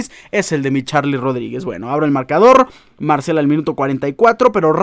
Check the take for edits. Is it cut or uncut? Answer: uncut